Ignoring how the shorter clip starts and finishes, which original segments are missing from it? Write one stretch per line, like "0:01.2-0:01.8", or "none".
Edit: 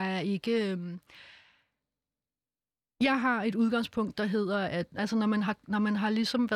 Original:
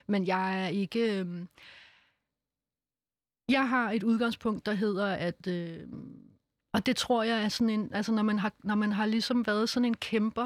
0:05.4-0:07.9